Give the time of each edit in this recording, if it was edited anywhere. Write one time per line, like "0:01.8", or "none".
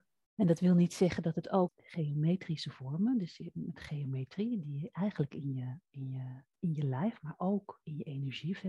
0:01.7
0:06.6